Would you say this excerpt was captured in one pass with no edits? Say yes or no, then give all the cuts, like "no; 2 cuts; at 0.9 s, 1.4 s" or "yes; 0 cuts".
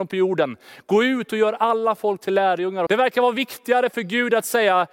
no; 1 cut; at 2.9 s